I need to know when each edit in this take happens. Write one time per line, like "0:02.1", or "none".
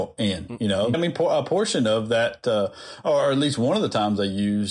0:00.9